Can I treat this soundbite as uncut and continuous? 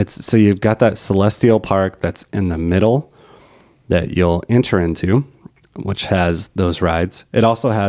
yes; 0 cuts

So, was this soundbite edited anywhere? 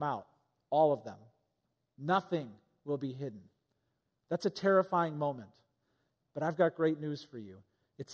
no; 0 cuts

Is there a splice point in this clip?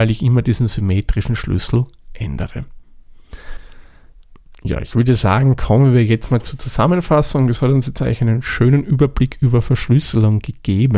no; 0 cuts

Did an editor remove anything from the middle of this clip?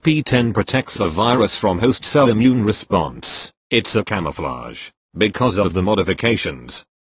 no; 0 cuts

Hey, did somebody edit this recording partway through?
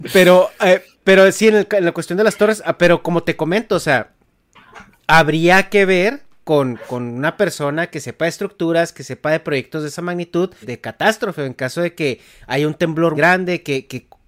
yes; 2 cuts; at 10.6 s, 13.1 s

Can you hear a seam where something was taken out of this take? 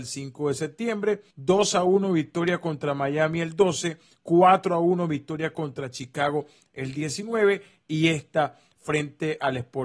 yes; 1 cut; at 1.3 s

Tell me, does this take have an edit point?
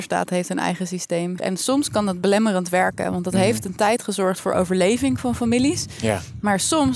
yes; 1 cut; at 1.4 s

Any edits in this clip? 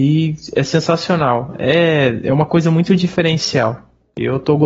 no; 0 cuts

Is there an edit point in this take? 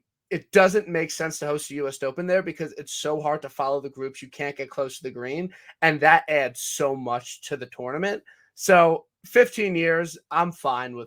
no; 0 cuts

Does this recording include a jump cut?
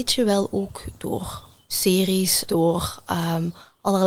yes; 1 cut; at 2.5 s

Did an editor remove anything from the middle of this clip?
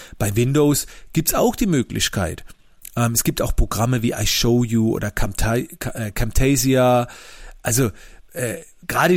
no; 0 cuts

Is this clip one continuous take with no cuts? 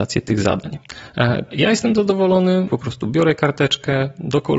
no; 2 cuts; at 1.5 s, 2.7 s

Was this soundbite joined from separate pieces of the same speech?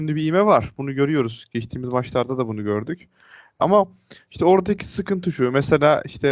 yes; 1 cut; at 3.6 s

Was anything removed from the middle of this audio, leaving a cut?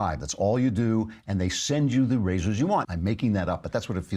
yes; 1 cut; at 2.8 s

